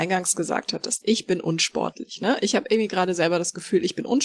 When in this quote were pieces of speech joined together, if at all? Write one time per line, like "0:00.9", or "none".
none